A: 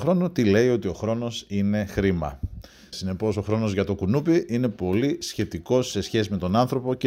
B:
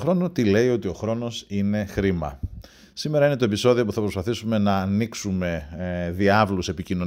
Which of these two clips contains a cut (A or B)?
A